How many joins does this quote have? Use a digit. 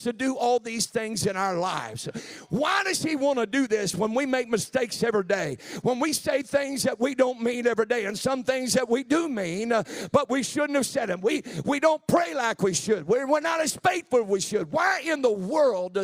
0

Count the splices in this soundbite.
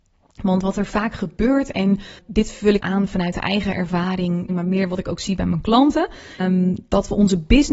3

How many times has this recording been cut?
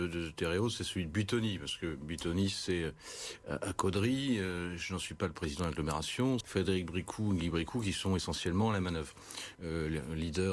2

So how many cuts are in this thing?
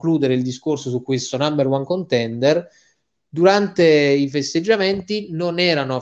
0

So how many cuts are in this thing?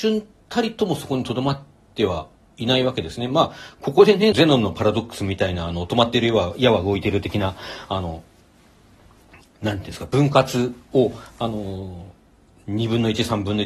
1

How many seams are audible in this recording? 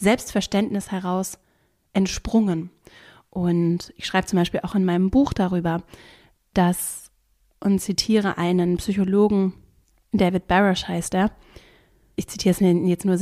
0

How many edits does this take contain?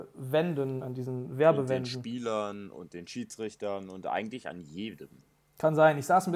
0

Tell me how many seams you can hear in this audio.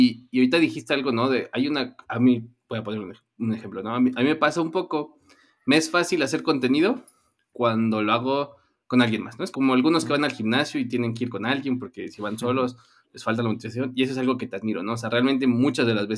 1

